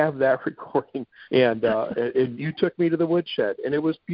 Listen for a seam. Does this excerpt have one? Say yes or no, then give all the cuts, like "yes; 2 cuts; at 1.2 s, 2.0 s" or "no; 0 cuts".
yes; 2 cuts; at 1.2 s, 2.3 s